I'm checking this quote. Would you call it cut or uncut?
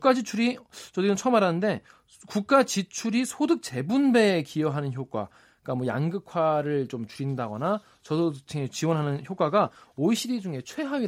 uncut